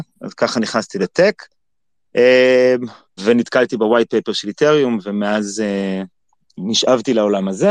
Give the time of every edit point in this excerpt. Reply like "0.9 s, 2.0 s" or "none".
3.2 s